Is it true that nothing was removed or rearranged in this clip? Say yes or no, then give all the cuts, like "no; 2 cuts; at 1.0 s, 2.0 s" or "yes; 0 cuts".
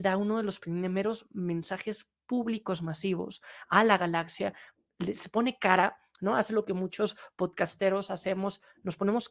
yes; 0 cuts